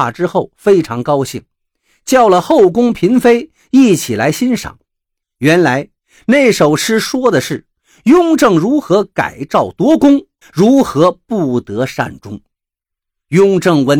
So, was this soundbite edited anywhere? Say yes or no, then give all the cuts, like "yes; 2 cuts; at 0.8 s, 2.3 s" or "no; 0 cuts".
yes; 2 cuts; at 5.2 s, 10.4 s